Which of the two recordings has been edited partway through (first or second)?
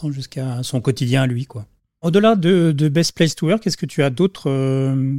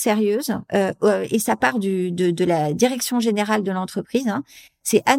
first